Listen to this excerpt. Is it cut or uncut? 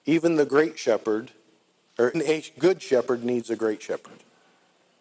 cut